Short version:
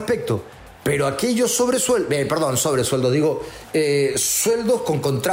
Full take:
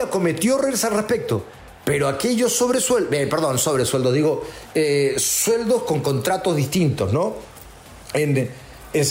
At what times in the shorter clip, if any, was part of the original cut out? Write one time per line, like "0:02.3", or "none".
none